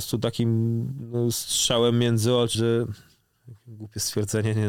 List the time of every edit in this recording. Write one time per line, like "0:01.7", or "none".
0:02.5